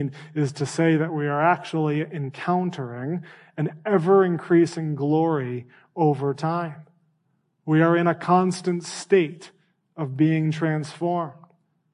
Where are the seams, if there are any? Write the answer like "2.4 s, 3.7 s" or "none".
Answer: none